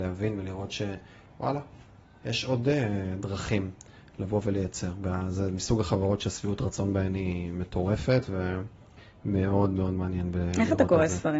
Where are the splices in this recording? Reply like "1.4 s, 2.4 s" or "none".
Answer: none